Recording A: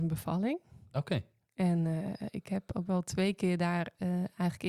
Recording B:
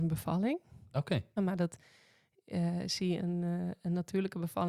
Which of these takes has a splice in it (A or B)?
B